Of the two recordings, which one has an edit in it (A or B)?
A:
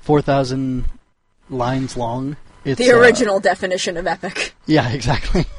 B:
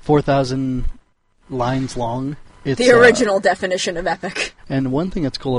B